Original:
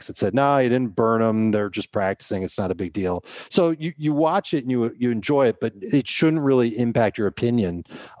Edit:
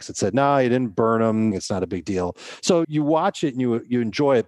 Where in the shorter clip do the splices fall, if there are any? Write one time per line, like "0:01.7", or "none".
0:01.5
0:02.8